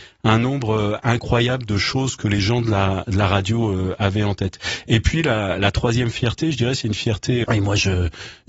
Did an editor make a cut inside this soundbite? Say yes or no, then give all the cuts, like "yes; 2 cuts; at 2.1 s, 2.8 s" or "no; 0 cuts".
yes; 1 cut; at 7.4 s